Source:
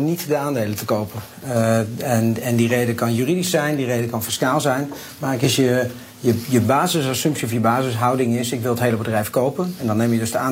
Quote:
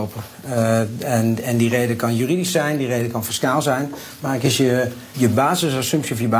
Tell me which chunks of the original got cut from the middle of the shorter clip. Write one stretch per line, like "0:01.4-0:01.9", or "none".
0:06.1-0:06.5